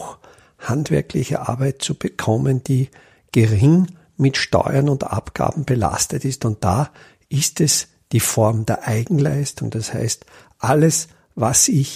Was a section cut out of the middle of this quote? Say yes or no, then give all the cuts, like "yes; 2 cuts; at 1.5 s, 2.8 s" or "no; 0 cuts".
no; 0 cuts